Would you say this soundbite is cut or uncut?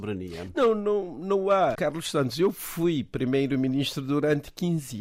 cut